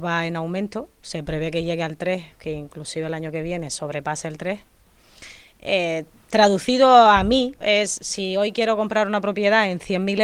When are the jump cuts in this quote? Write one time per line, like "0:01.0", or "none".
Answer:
0:07.6